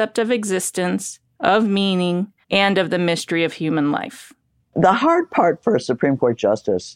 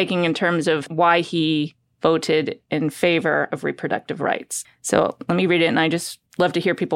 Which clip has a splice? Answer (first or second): first